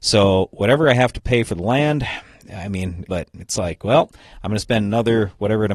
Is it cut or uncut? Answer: cut